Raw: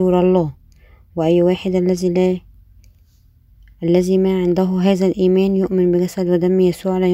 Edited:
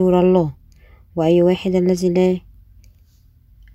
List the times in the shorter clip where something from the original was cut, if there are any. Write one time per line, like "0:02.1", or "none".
none